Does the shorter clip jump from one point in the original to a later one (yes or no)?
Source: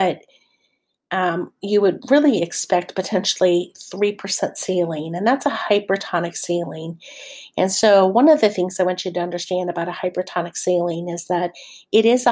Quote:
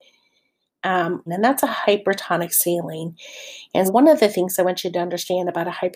yes